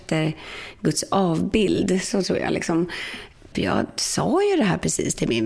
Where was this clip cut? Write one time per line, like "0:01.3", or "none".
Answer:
0:03.5

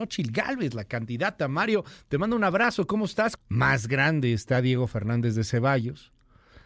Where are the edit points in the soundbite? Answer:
0:03.4

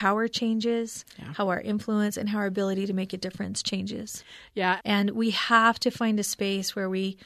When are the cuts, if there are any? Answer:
0:04.8

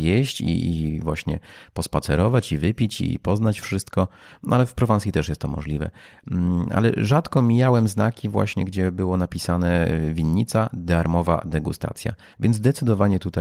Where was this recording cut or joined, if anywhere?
0:12.3

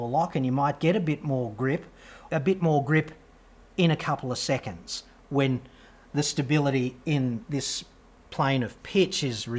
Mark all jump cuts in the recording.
0:02.3

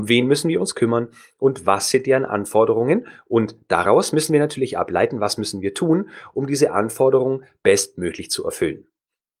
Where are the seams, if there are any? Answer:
none

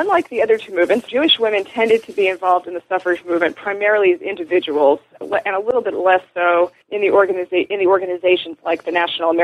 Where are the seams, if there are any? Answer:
0:01.1
0:06.8

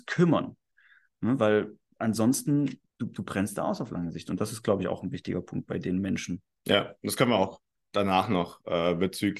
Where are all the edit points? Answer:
0:02.9

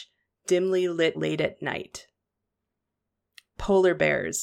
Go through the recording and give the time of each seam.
0:01.1

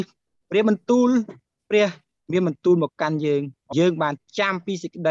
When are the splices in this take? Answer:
0:03.7

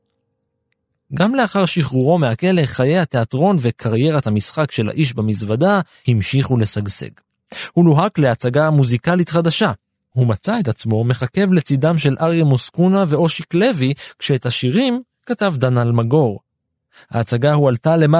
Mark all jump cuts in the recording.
none

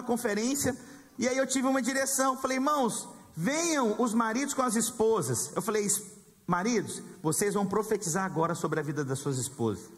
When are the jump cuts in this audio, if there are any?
0:01.2

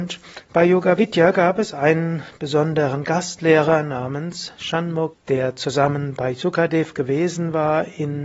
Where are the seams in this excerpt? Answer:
0:05.1

